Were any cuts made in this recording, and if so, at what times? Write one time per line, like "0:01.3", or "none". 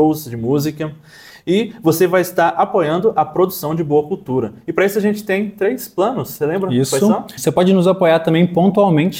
0:07.4